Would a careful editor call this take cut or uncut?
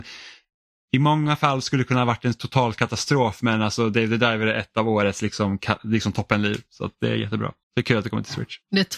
cut